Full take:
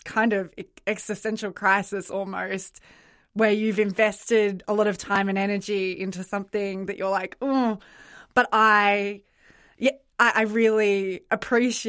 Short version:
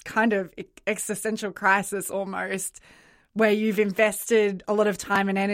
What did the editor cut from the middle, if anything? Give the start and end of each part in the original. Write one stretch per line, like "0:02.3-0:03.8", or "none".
none